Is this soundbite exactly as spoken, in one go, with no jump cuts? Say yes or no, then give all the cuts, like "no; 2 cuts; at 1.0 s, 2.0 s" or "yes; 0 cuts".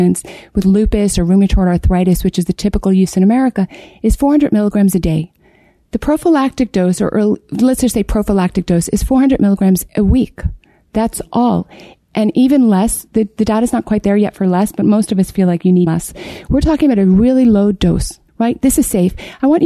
no; 2 cuts; at 15.9 s, 18.3 s